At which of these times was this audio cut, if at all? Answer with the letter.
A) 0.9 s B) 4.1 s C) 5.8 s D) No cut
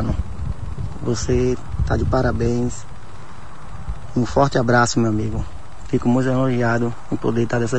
D